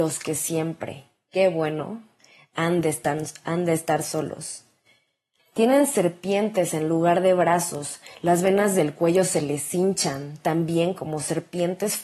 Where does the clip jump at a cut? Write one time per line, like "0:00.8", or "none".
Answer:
0:05.4